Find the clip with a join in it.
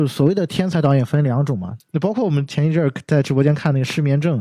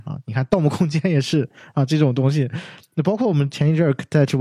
first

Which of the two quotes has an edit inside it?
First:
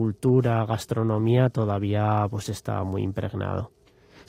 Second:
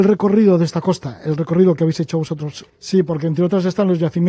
second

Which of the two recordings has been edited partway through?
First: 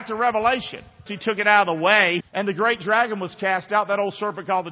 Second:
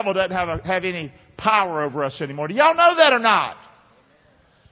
first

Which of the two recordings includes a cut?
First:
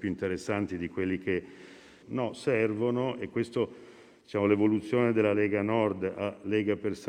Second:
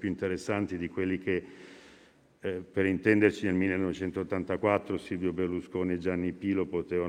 first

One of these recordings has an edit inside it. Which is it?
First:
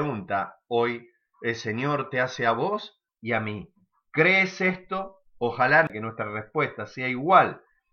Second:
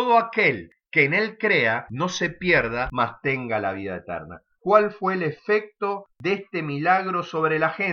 second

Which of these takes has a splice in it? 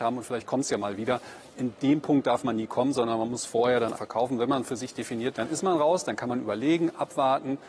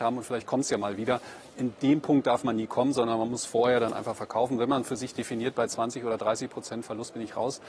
first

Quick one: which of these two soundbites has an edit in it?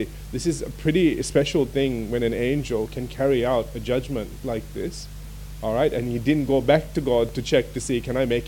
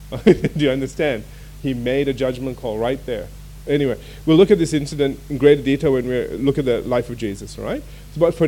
second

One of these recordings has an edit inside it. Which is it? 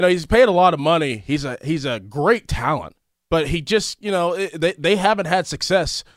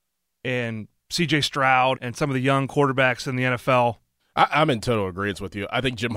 second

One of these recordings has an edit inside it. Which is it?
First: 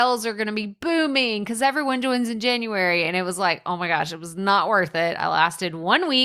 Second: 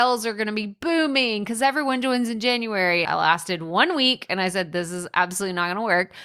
second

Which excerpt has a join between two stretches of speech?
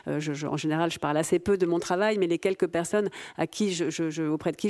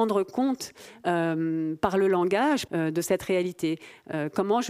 second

